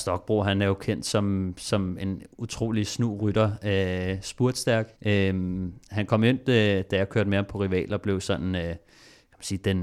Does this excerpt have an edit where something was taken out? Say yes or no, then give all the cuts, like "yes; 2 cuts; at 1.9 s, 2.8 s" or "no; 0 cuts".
yes; 1 cut; at 5.0 s